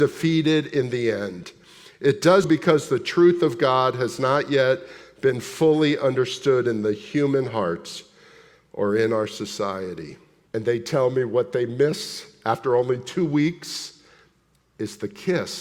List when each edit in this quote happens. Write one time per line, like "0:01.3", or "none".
0:02.4
0:10.5